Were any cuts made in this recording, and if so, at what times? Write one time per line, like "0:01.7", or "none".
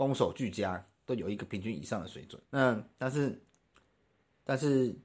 0:01.1
0:02.4